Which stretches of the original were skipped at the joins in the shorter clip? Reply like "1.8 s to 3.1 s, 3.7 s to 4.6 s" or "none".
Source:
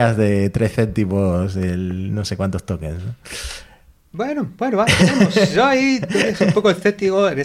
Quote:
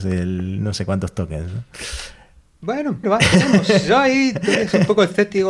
4.5 s to 4.7 s